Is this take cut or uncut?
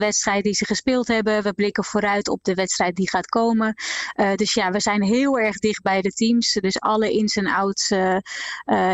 uncut